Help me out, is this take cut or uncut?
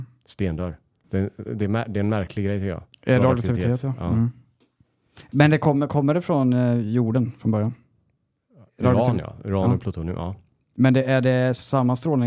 uncut